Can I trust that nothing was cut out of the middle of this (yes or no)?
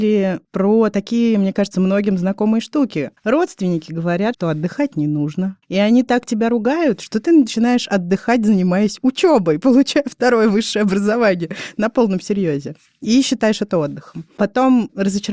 no